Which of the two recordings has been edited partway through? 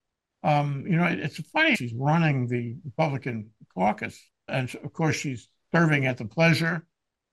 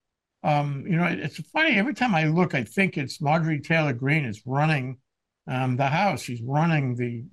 first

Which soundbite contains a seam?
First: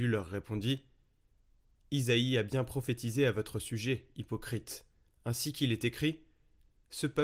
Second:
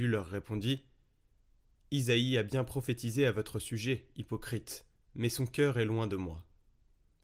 second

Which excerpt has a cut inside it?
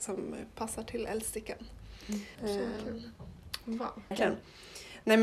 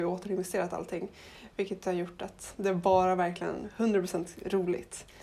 first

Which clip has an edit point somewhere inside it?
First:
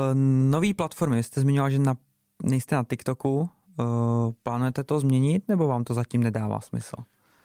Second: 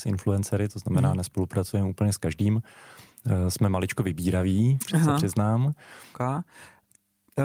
second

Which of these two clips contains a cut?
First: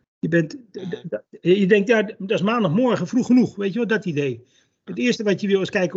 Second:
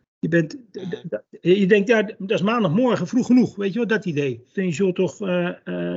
second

